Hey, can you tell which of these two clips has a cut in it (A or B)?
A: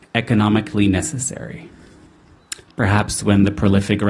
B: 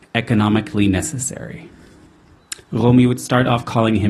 A